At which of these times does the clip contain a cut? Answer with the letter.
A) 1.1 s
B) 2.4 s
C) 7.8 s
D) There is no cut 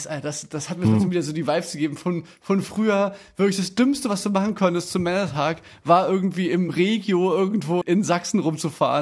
C